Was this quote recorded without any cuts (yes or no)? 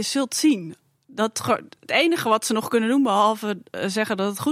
yes